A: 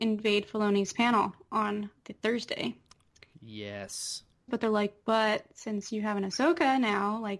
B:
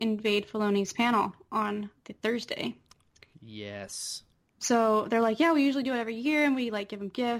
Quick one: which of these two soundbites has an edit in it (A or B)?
A